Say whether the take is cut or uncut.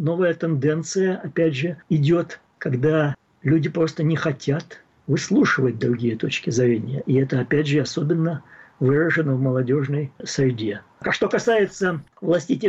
uncut